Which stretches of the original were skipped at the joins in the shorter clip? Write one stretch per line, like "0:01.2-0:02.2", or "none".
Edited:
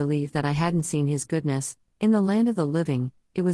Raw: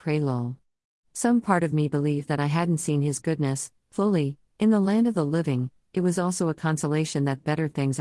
0:03.8-0:04.5